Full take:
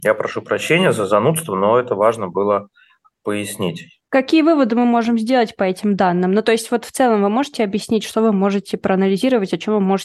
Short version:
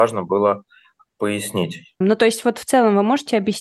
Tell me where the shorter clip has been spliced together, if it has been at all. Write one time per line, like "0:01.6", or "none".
0:02.0